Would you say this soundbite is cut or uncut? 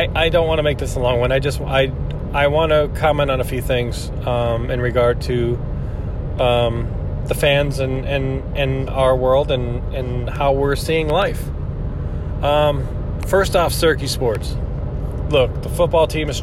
uncut